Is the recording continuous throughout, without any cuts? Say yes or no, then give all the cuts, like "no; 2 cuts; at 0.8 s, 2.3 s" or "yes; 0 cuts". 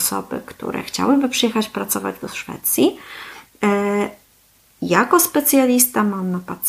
yes; 0 cuts